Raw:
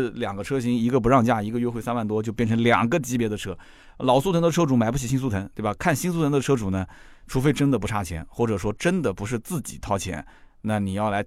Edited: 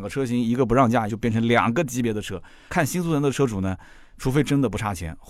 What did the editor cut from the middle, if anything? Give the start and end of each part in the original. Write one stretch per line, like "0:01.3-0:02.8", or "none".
0:01.4-0:02.2
0:03.8-0:05.8